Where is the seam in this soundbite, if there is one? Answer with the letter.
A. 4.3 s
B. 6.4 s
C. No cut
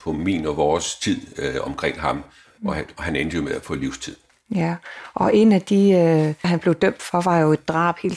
B